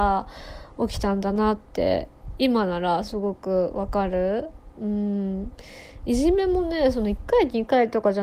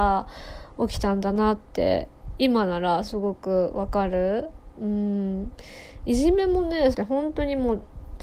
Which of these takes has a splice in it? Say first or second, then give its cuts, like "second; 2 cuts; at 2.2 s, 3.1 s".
second; 1 cut; at 6.9 s